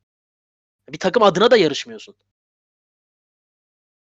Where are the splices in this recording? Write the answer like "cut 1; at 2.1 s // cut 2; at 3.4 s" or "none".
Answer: none